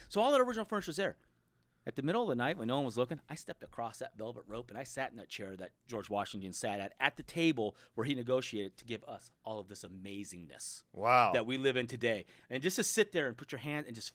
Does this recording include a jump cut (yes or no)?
no